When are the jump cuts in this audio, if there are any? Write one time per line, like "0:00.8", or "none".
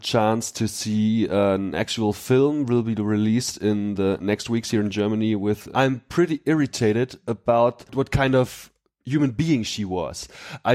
0:05.7